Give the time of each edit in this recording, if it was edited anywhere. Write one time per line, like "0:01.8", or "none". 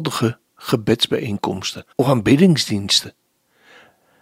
0:01.9